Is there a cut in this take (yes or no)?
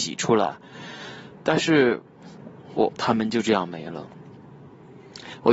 yes